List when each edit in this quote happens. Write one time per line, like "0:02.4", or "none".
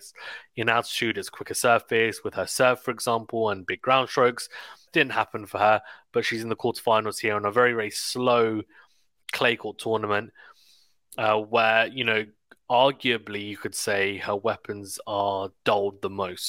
0:04.9

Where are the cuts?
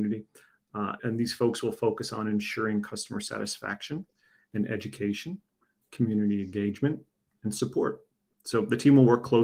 0:01.0

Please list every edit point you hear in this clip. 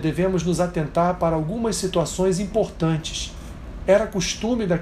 0:03.8

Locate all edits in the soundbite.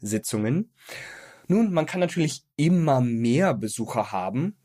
0:01.4

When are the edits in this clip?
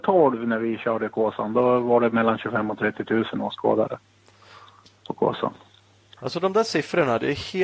none

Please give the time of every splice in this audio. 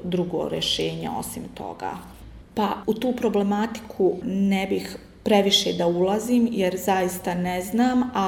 0:02.4

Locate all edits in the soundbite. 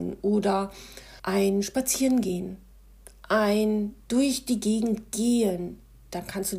0:01.2

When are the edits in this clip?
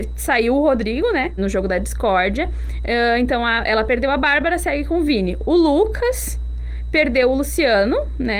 0:01.4

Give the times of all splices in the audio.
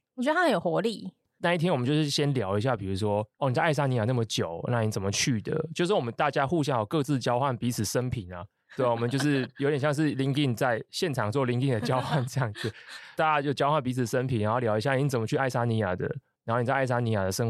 none

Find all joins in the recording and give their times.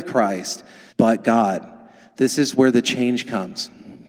0:00.9

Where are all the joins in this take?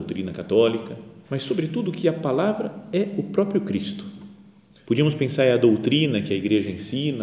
0:01.2
0:04.8

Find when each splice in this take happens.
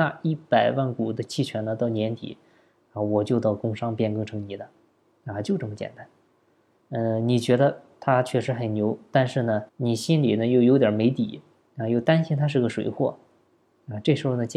0:06.8
0:09.7

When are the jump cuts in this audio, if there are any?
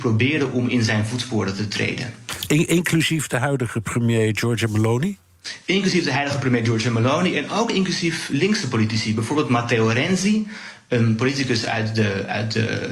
none

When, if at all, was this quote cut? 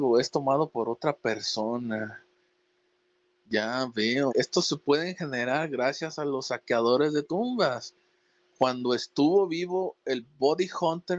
0:04.3
0:08.4

